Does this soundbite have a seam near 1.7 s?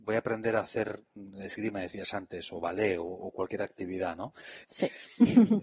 no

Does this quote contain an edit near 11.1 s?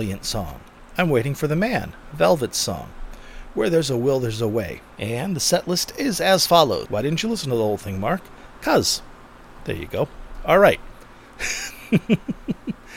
no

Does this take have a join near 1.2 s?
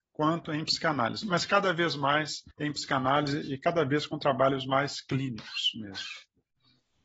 yes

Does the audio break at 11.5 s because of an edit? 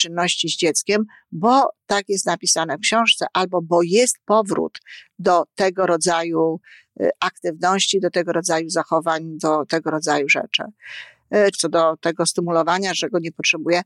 yes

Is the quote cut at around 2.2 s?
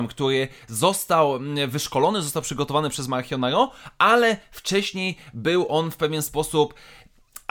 no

